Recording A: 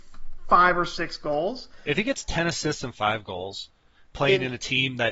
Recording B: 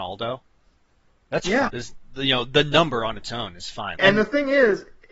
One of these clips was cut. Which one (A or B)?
B